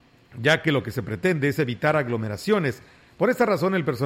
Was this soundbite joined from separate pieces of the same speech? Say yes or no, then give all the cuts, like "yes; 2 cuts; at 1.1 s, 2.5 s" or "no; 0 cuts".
no; 0 cuts